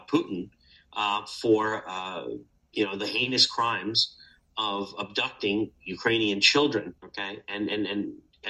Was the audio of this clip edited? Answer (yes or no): yes